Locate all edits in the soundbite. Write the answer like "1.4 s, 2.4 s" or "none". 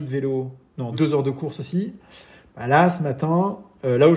0.9 s